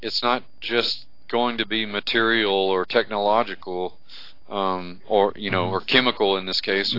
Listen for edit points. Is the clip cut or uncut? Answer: uncut